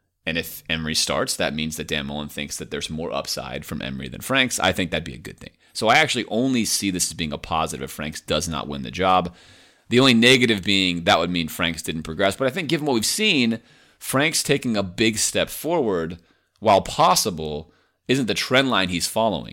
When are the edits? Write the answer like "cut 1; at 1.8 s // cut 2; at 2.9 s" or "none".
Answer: none